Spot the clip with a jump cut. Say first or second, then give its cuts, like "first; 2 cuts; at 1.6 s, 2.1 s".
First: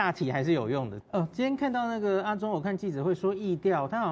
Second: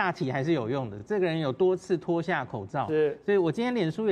first; 1 cut; at 1.0 s